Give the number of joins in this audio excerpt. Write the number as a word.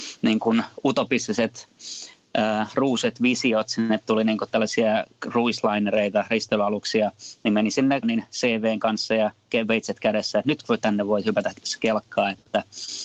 one